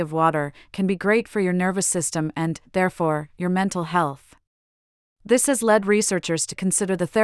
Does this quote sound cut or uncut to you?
uncut